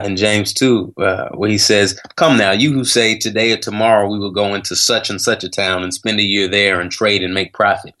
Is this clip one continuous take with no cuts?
yes; 0 cuts

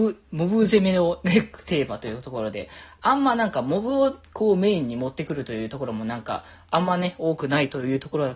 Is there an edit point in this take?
no; 0 cuts

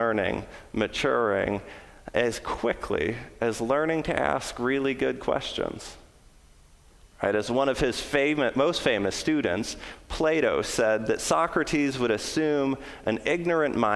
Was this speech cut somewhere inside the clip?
yes; 1 cut; at 7.0 s

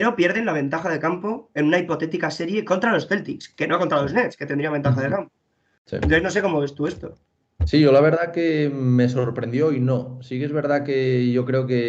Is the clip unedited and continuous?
yes; 0 cuts

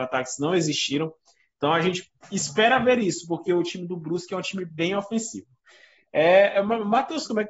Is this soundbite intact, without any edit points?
yes; 0 cuts

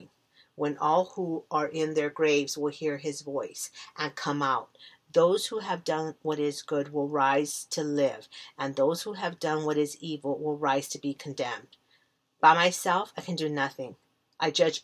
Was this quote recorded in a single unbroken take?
yes; 0 cuts

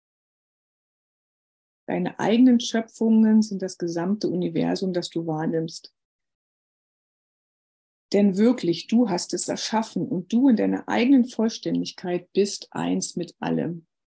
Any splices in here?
no; 0 cuts

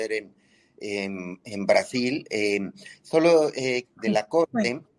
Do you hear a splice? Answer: yes; 1 cut; at 3.8 s

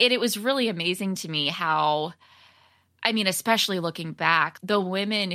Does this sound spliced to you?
no; 0 cuts

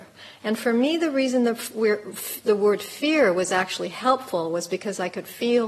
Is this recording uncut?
yes; 0 cuts

